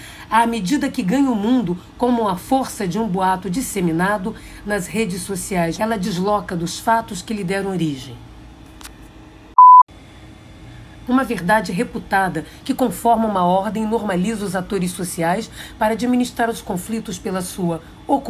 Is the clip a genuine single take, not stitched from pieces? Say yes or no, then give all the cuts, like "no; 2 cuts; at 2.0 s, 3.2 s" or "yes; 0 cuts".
no; 2 cuts; at 5.8 s, 11.1 s